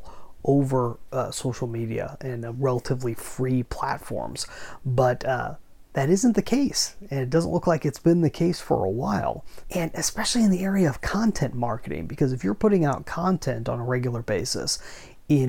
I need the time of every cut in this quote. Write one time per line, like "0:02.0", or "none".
0:09.6